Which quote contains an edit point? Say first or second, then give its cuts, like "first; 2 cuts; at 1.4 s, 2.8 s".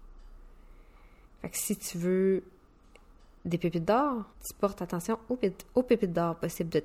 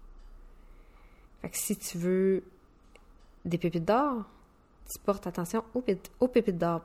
first; 1 cut; at 4.3 s